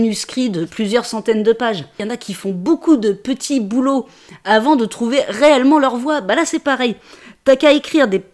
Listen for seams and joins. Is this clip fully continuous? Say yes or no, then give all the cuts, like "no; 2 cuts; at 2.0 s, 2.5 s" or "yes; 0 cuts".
no; 1 cut; at 2.0 s